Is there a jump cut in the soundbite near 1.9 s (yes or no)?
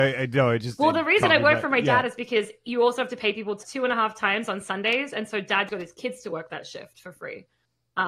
no